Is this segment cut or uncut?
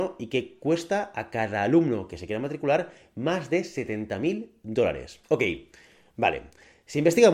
cut